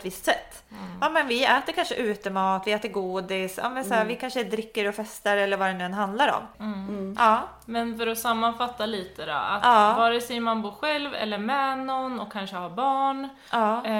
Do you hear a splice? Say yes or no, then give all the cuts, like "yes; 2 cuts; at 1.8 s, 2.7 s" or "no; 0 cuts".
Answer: yes; 1 cut; at 6.5 s